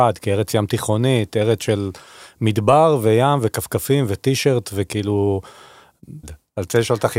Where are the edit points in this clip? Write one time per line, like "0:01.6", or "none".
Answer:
0:06.2